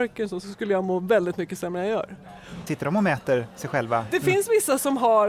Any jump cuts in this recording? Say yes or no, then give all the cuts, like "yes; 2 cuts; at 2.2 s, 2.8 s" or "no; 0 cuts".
yes; 1 cut; at 2.7 s